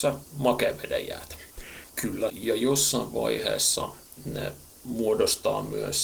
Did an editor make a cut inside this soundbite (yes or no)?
yes